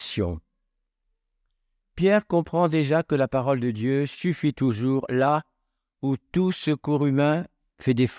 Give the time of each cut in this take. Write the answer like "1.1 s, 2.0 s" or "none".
none